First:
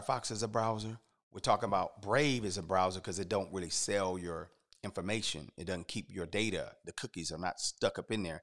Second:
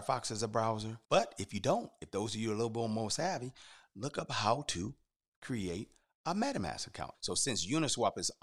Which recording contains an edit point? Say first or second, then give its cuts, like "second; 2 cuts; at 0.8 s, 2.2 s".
second; 2 cuts; at 1.0 s, 7.1 s